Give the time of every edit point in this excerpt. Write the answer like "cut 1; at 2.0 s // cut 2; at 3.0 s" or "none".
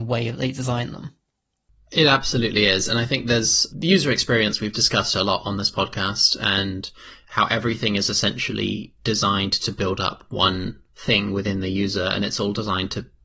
cut 1; at 3.7 s // cut 2; at 10.9 s